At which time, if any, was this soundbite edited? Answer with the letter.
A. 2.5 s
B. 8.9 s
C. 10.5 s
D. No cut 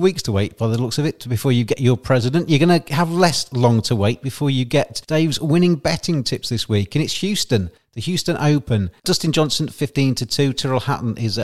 D